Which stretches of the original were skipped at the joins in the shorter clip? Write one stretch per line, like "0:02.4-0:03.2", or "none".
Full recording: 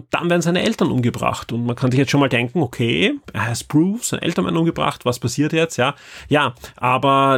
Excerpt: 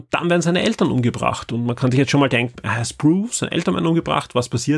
0:02.5-0:03.2

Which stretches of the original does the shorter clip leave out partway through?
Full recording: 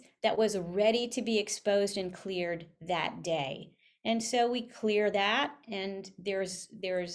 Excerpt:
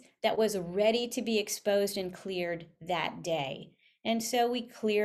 none

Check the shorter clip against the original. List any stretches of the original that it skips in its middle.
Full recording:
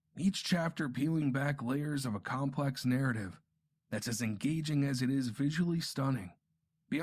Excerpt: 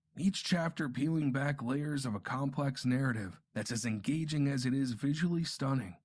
0:03.4-0:03.8

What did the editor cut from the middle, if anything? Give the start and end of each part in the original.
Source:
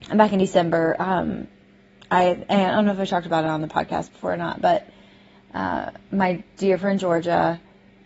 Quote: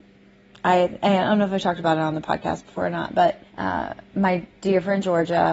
0:04.9-0:05.4

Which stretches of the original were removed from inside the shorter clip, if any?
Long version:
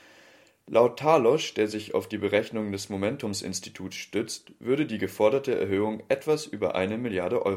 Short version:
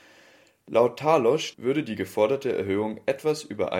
0:01.5-0:04.6

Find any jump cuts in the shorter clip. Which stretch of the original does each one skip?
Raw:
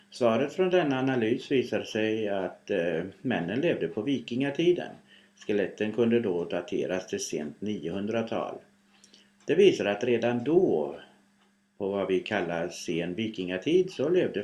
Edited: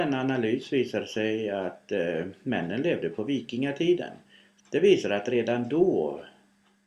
0:05.4-0:09.3

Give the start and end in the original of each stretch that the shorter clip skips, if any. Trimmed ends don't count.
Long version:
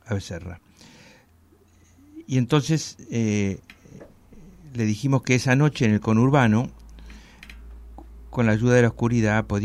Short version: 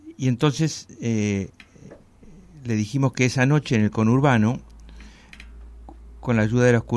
none

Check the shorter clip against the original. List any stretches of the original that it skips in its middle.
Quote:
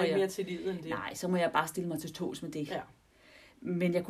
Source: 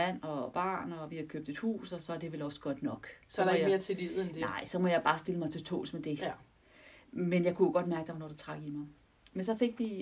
none

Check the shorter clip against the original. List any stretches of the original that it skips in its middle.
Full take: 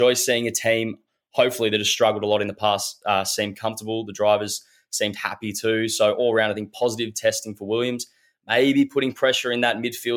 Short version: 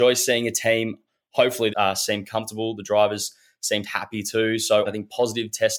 0:01.7-0:03.0
0:06.1-0:06.5

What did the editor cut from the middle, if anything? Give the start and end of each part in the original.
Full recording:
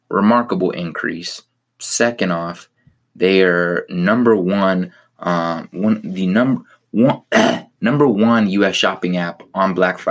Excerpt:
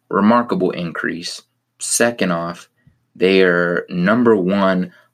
none

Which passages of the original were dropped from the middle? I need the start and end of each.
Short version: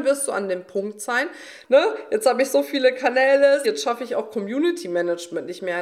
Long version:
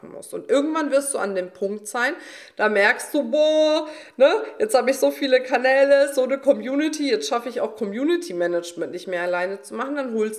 0:02.5-0:04.1
0:06.1-0:07.1

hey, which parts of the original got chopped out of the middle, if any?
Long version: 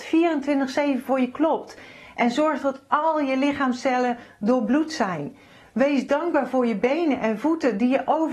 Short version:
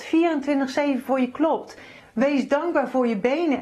0:02.0-0:05.6

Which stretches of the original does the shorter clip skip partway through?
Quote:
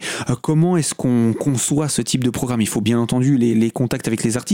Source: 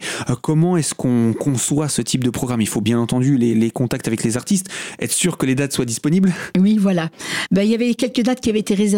none

